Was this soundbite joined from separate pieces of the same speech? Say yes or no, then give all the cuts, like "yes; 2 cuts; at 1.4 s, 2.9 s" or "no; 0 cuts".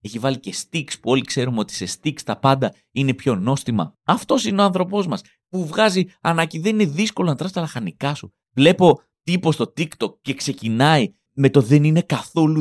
yes; 2 cuts; at 5.4 s, 8.4 s